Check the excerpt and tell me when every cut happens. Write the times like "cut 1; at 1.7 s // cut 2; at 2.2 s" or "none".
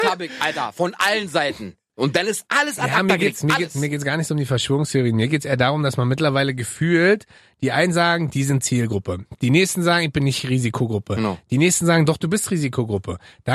cut 1; at 1.9 s